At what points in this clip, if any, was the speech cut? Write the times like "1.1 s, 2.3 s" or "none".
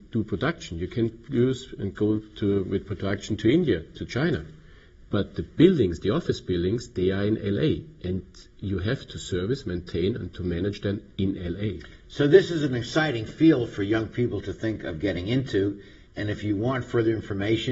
none